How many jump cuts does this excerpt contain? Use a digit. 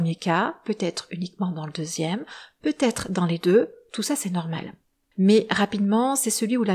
1